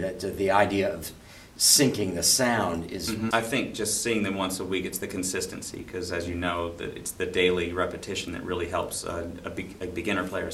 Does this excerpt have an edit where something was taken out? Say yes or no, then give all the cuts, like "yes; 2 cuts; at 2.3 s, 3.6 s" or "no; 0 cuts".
yes; 1 cut; at 3.3 s